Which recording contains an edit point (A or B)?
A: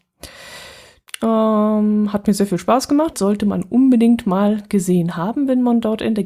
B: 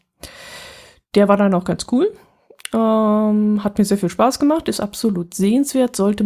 A